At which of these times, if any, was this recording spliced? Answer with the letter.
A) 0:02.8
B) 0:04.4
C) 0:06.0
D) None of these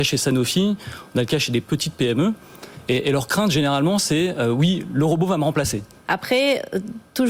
C